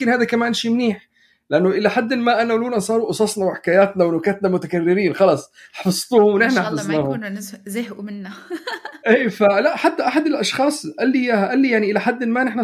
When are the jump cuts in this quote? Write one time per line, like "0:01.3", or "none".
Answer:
none